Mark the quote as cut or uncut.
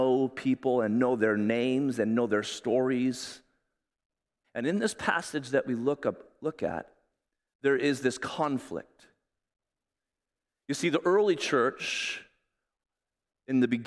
cut